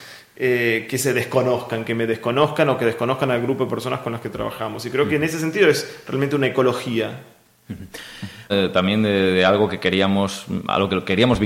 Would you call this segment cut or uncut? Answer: cut